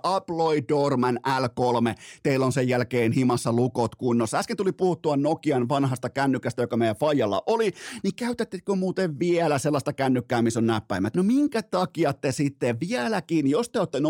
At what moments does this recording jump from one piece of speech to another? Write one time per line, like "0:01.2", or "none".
0:11.1